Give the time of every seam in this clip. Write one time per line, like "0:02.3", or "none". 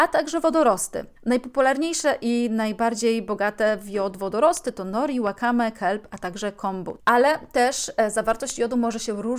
0:01.2
0:07.0